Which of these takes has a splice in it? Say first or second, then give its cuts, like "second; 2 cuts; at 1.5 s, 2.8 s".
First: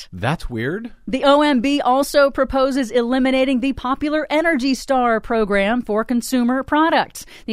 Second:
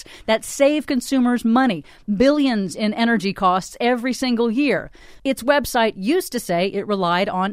second; 1 cut; at 5.2 s